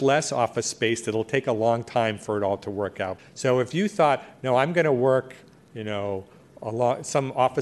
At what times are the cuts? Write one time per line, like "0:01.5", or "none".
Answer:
0:03.2